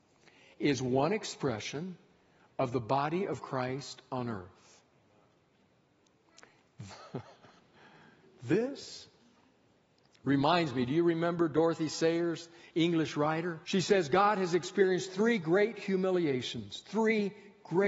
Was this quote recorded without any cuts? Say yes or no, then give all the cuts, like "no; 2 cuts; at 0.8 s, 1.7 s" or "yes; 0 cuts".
no; 2 cuts; at 6.9 s, 13.6 s